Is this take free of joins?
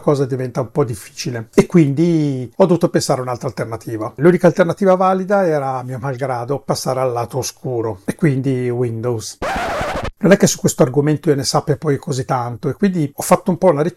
yes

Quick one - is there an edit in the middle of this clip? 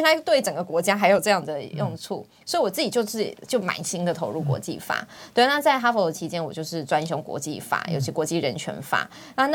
no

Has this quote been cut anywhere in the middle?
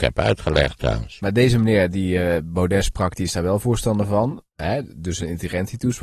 no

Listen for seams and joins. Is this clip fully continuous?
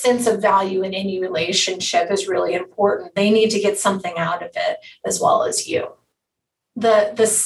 yes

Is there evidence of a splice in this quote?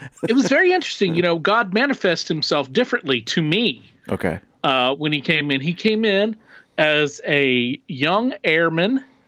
no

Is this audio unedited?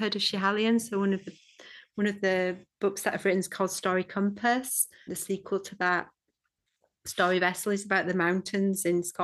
no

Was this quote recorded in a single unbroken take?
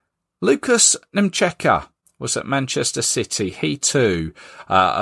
yes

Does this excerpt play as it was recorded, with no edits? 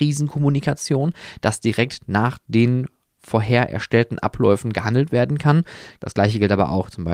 no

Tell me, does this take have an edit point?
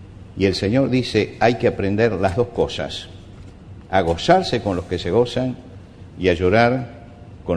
no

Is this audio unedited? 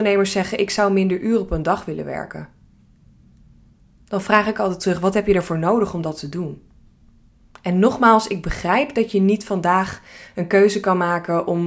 yes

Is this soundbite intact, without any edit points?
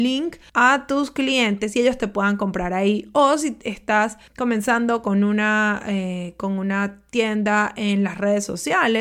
yes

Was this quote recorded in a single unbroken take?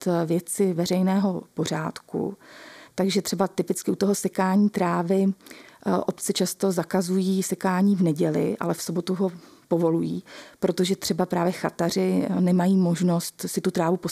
no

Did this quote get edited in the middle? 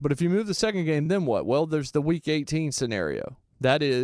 no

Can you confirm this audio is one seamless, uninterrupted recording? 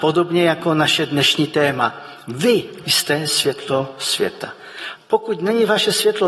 no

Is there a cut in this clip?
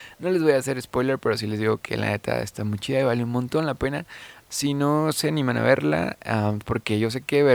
yes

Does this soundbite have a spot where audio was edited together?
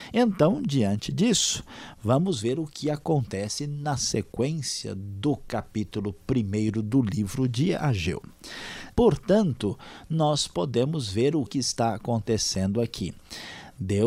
yes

